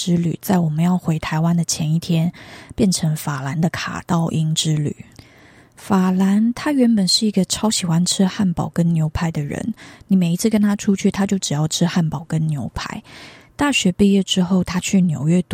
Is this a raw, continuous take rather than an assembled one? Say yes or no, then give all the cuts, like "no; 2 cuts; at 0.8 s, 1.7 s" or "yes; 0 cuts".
yes; 0 cuts